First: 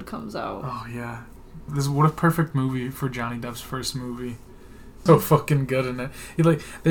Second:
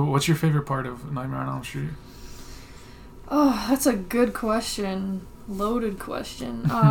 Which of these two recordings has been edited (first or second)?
first